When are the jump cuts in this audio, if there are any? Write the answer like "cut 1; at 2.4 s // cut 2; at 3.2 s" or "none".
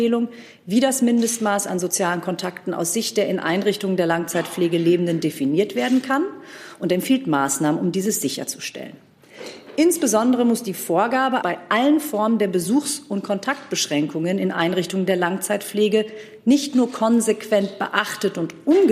cut 1; at 11.4 s